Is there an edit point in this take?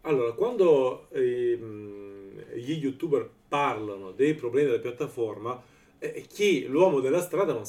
no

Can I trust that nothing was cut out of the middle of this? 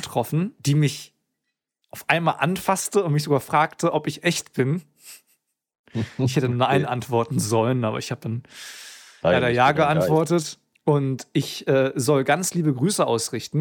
yes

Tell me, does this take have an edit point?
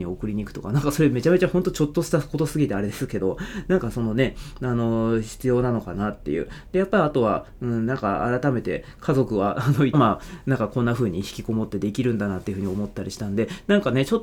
yes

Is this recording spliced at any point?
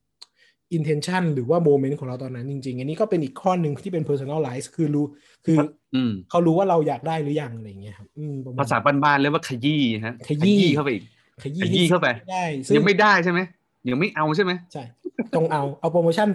no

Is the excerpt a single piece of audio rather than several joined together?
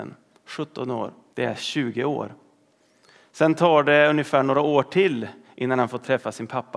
no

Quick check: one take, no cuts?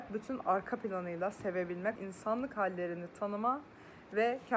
no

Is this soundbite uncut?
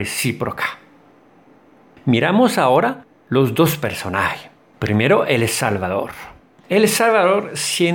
yes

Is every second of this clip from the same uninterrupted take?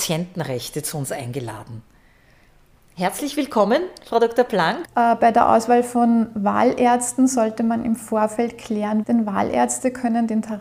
no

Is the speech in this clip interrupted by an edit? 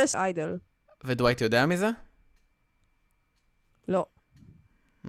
no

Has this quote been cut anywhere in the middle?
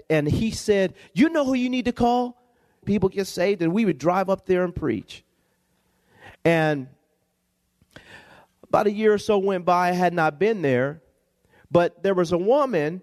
yes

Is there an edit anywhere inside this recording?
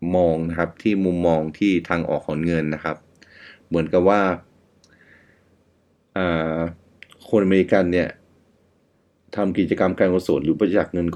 no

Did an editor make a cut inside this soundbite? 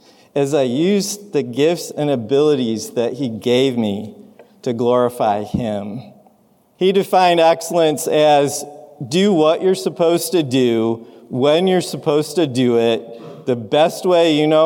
yes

